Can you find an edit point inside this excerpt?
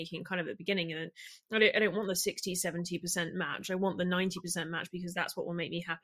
no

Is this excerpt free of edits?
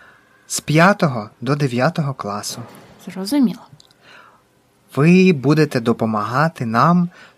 yes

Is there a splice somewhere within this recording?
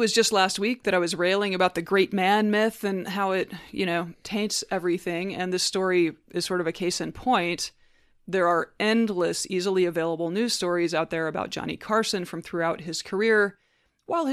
no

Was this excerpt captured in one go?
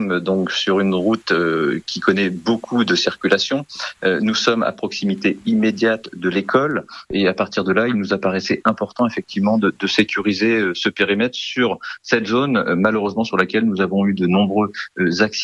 yes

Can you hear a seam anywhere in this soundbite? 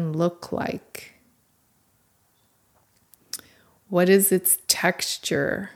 no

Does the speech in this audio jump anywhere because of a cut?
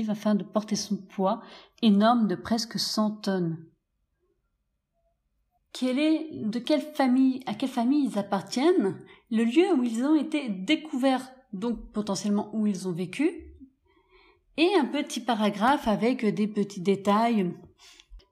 yes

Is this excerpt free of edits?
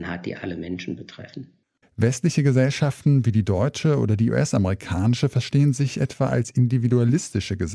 no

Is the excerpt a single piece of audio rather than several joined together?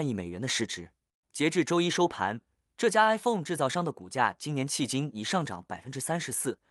yes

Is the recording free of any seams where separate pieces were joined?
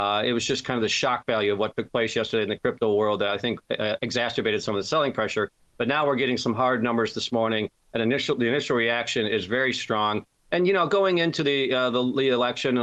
yes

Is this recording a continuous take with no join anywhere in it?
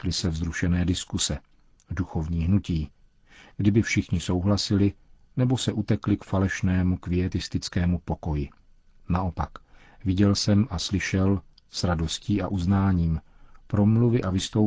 yes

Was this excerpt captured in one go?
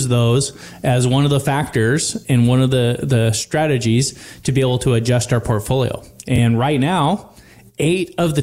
yes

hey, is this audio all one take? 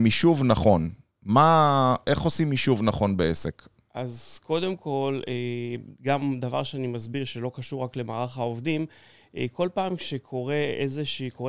yes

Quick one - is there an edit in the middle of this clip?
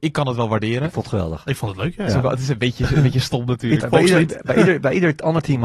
yes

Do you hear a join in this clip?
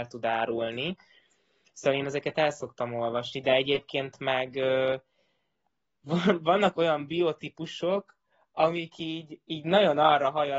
no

